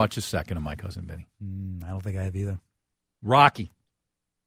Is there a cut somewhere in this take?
no; 0 cuts

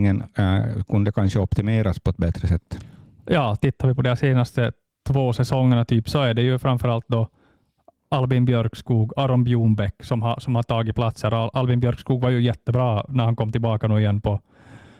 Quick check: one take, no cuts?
yes; 0 cuts

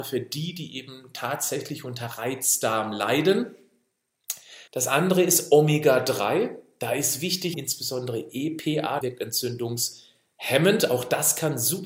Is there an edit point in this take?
yes; 3 cuts; at 4.7 s, 7.5 s, 9.0 s

